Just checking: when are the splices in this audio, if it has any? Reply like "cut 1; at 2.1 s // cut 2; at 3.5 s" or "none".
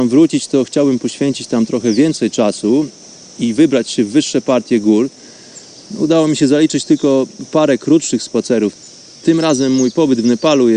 none

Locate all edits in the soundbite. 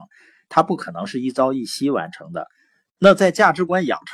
cut 1; at 2.9 s

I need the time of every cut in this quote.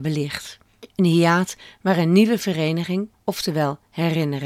cut 1; at 0.9 s // cut 2; at 3.1 s

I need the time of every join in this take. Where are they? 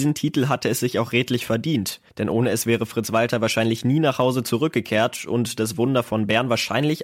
cut 1; at 2.1 s

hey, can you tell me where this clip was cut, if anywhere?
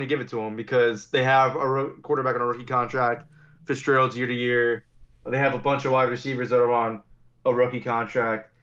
none

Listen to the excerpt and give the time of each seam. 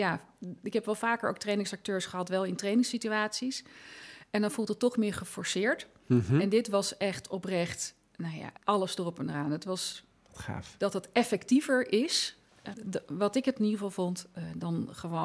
cut 1; at 8.6 s // cut 2; at 10.8 s // cut 3; at 12.7 s

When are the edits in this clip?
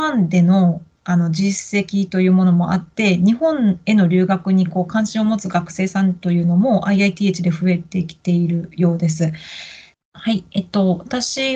cut 1; at 9.9 s

